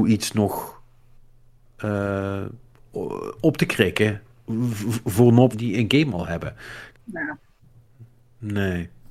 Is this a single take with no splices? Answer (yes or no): no